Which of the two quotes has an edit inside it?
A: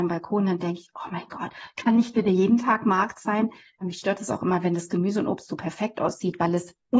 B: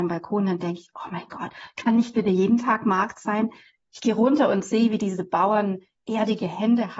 A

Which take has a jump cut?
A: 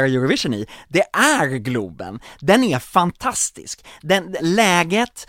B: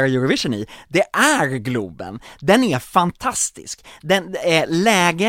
A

